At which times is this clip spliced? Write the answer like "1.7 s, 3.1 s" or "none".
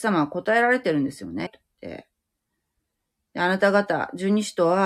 1.5 s